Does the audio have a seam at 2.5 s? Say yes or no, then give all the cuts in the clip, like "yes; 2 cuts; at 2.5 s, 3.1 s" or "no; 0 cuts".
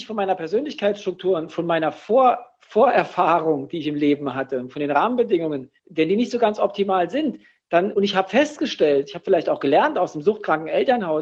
no; 2 cuts; at 5.8 s, 7.9 s